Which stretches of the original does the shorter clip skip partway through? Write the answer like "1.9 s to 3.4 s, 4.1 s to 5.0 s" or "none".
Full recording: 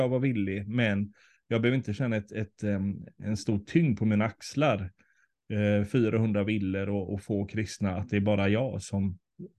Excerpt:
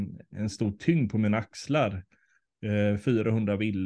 none